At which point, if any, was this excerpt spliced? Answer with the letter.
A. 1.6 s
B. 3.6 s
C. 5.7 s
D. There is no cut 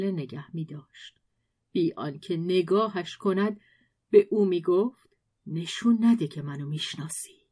D